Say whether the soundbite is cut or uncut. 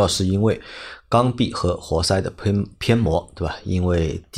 uncut